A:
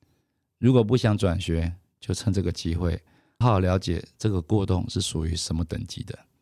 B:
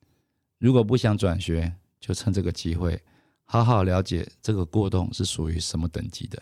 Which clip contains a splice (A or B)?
A